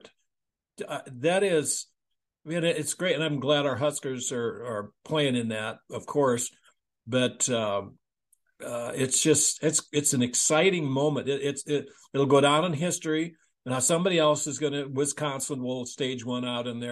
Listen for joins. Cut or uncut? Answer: uncut